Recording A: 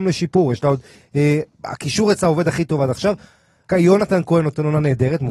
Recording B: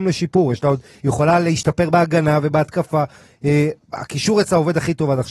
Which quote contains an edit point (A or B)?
A